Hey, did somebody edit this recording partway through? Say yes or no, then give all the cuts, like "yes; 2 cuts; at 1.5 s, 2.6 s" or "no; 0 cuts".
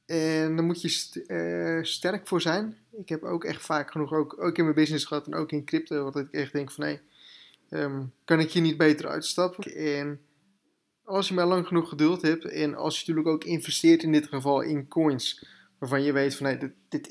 yes; 1 cut; at 9.6 s